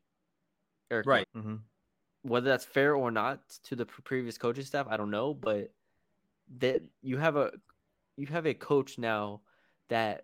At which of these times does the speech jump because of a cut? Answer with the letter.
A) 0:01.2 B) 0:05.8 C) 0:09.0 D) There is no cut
A